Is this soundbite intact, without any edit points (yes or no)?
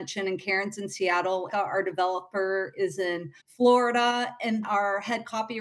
no